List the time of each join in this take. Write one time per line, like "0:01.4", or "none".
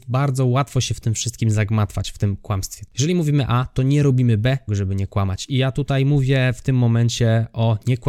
0:02.9
0:04.7

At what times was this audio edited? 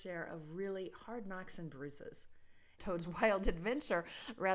0:02.8

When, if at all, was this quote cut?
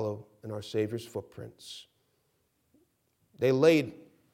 0:03.2

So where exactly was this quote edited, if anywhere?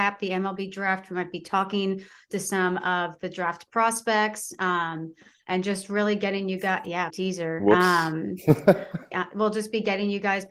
0:07.1
0:09.1

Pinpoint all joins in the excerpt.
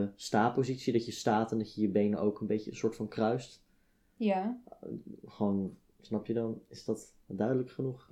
none

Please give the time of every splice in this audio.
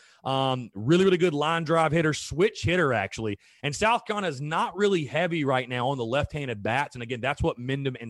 none

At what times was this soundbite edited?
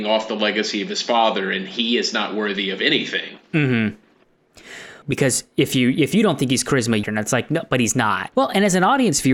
0:05.0
0:07.0
0:08.3

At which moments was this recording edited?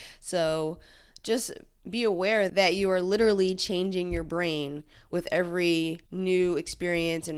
0:06.1

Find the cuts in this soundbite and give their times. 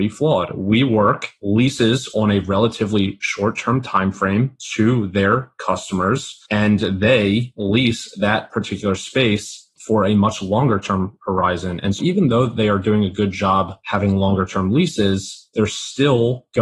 0:12.0

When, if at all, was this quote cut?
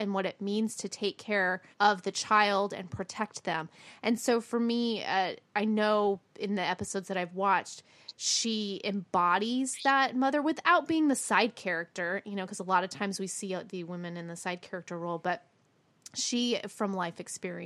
0:01.7

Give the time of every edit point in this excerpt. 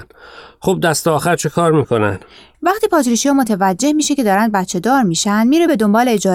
0:02.5

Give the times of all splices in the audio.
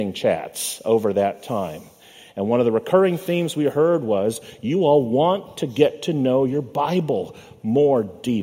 none

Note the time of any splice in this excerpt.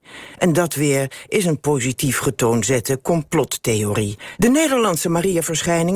0:04.4

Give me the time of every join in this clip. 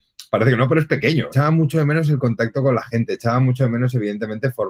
0:01.3

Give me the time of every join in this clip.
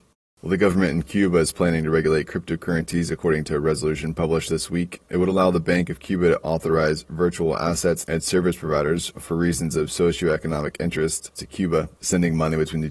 0:11.4

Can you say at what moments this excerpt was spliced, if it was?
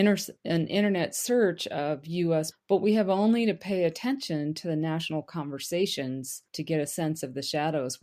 0:02.5
0:06.5

